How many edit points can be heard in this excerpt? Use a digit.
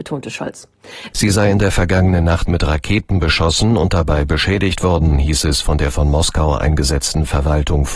1